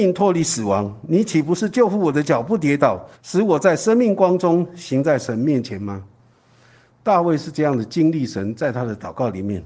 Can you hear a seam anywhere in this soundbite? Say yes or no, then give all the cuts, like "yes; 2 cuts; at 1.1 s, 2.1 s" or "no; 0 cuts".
yes; 1 cut; at 3.1 s